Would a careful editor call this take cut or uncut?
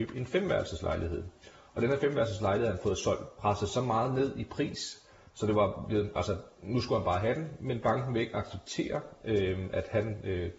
uncut